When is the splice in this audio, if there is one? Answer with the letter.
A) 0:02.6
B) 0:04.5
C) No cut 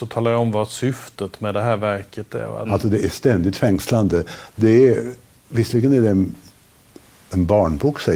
A